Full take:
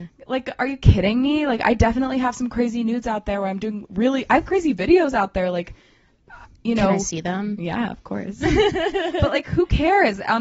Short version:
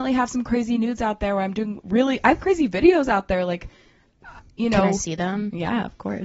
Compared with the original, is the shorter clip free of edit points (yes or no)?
yes